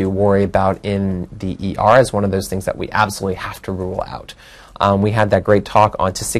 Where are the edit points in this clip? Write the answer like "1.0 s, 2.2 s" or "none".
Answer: none